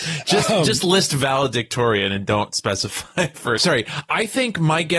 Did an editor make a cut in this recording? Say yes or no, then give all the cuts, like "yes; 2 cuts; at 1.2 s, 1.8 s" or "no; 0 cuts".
yes; 1 cut; at 3.6 s